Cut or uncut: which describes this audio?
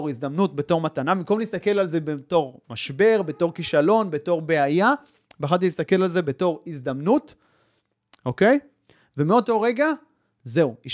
uncut